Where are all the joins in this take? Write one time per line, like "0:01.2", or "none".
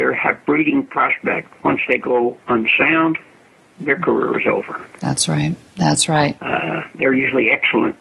0:04.9
0:06.4